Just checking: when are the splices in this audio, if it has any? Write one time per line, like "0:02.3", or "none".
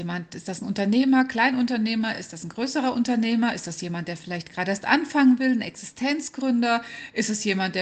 none